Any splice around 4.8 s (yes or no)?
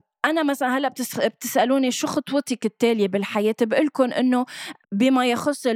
yes